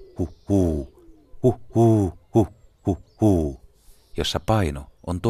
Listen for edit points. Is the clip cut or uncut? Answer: uncut